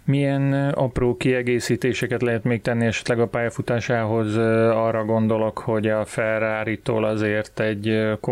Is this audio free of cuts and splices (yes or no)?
yes